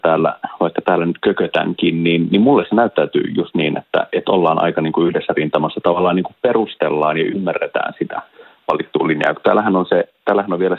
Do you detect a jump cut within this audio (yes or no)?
no